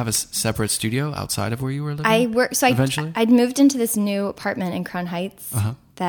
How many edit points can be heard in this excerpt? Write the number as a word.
zero